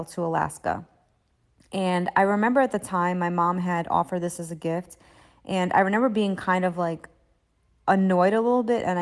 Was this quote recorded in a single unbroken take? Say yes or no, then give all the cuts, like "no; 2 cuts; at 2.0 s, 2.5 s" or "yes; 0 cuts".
yes; 0 cuts